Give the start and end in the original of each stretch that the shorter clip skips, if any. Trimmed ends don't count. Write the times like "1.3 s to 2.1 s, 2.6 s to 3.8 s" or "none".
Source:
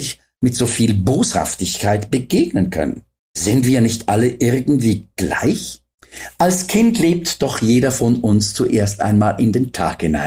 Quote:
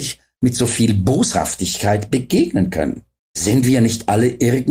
none

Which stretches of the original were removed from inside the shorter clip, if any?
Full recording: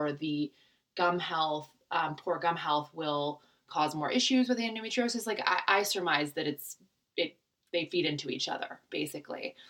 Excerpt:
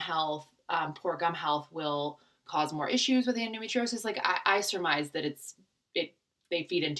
none

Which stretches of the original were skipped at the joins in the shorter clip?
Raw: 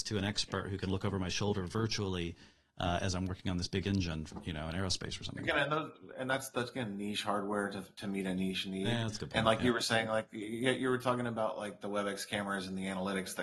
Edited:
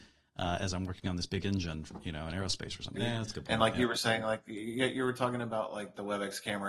5.4 s to 8.8 s

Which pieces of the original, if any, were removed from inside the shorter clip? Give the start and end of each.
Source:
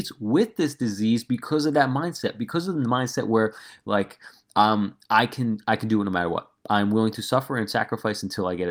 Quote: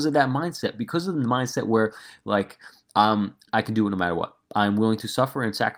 5.1 s to 5.6 s

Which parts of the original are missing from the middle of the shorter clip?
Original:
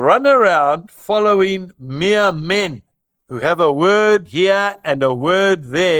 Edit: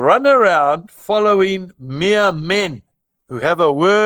none

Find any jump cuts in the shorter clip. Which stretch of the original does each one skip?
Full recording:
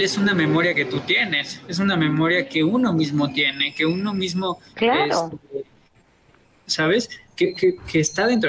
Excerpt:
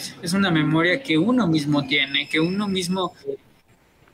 4.7 s to 5.5 s

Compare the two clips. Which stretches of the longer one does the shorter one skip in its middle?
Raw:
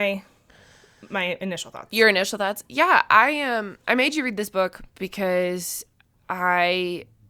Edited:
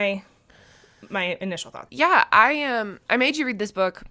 1.9 s to 2.7 s

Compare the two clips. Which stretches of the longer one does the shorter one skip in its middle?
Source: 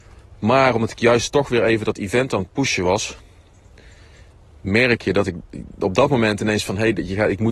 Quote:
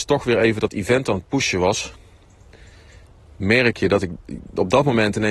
none

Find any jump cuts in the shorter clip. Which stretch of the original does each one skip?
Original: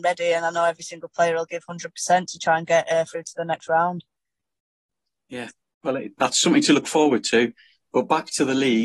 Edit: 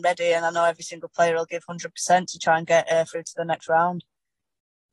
none

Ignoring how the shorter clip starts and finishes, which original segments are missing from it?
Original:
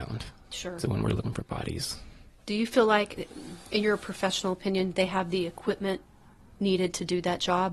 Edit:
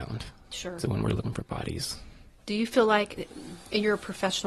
none

